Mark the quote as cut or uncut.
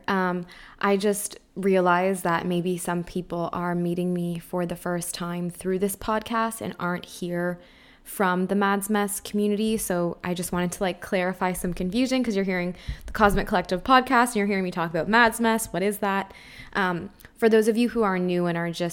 uncut